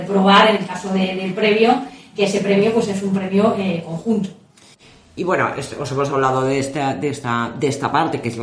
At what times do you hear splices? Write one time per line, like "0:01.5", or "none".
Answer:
none